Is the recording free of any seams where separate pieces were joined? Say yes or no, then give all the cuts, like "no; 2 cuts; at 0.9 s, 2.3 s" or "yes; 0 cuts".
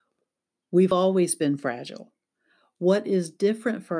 yes; 0 cuts